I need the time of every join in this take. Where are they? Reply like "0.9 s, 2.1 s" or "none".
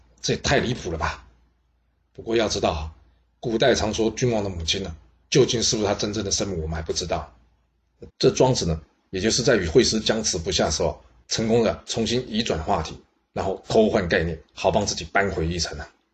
8.1 s